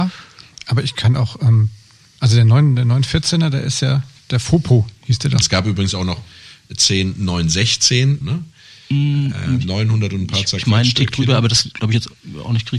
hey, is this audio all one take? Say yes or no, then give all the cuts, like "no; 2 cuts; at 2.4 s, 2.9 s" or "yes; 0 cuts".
no; 2 cuts; at 5.4 s, 8.2 s